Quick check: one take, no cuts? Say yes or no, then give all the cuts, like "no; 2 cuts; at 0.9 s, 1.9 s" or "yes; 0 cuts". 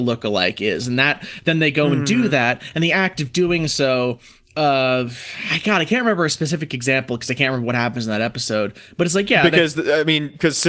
yes; 0 cuts